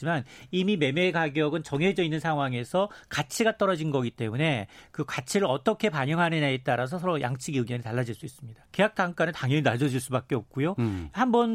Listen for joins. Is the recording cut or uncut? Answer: cut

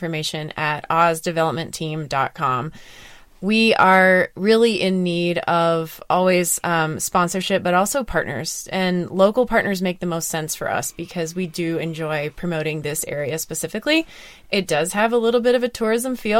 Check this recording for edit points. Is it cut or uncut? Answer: uncut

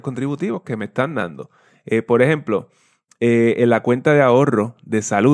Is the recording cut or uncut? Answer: uncut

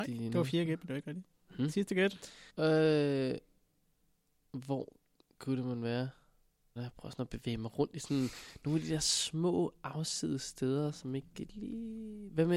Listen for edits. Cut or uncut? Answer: cut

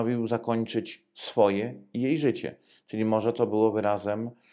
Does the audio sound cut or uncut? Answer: uncut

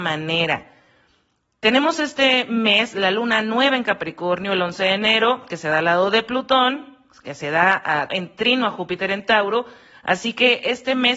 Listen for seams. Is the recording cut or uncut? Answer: cut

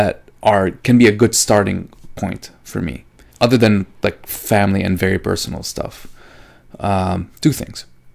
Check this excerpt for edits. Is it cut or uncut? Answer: cut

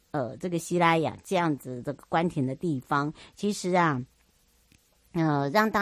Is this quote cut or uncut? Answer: uncut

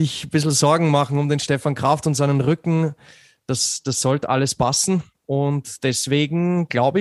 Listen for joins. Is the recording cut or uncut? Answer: uncut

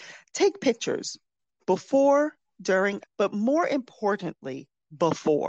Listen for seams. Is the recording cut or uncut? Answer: cut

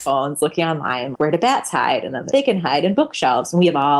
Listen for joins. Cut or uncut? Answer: cut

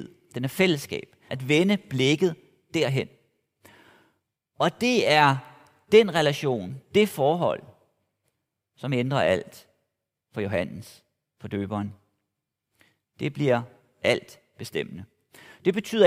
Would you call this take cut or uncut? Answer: cut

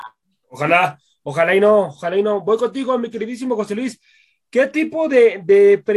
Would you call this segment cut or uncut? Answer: uncut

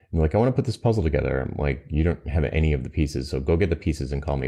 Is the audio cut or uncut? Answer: uncut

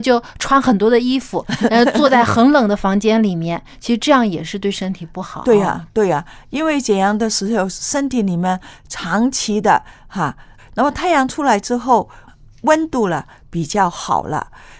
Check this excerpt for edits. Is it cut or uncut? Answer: cut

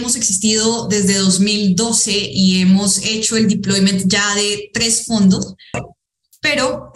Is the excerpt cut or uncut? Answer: cut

